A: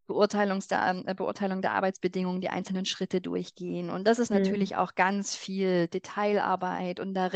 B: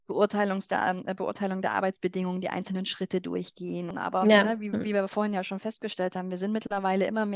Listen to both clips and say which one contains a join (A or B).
B